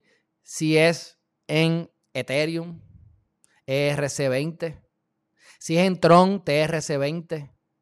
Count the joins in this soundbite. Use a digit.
1